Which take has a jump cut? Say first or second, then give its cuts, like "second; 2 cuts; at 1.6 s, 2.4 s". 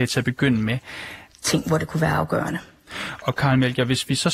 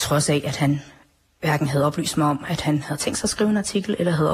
first; 1 cut; at 1.3 s